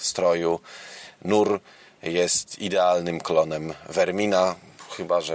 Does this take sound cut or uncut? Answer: uncut